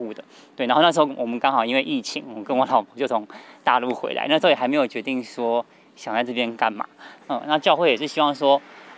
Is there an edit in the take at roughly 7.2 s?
yes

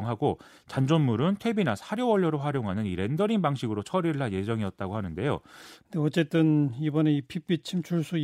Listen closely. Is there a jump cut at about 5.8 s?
yes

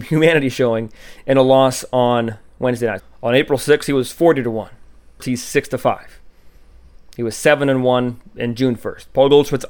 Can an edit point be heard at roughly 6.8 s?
no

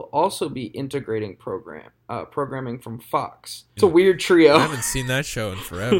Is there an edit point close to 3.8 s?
yes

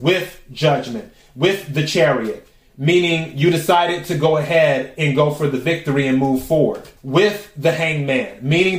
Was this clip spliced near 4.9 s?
no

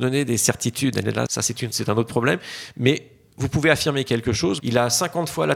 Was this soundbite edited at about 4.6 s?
yes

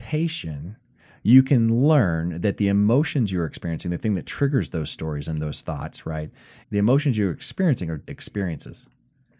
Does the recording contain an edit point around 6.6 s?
yes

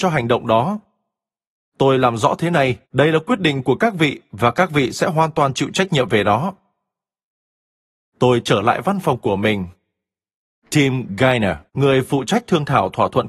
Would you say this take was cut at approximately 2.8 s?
yes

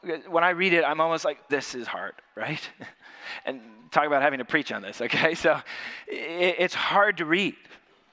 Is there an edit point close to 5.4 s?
no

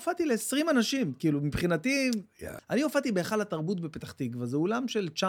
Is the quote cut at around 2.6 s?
yes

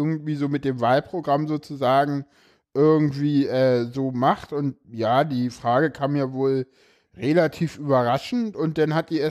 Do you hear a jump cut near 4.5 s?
no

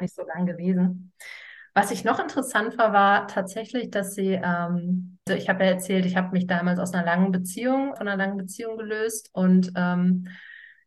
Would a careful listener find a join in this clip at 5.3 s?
yes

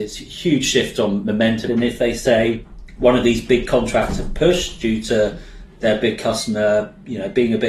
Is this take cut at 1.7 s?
yes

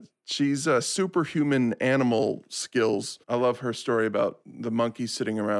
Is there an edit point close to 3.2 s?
yes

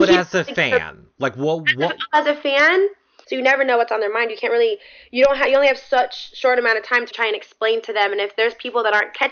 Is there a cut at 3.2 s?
yes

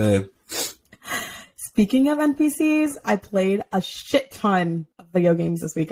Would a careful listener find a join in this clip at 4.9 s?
yes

